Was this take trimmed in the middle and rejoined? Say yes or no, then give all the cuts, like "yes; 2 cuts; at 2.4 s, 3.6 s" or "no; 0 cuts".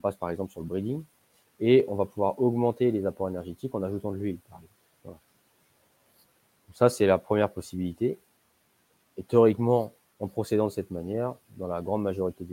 no; 0 cuts